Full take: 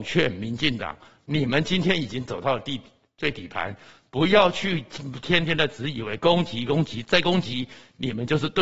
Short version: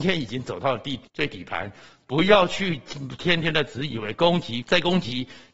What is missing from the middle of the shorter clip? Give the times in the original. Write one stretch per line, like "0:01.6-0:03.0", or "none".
0:02.9-0:03.1
0:06.7-0:07.0